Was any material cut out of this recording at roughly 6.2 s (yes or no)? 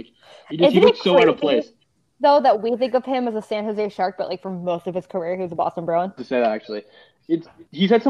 yes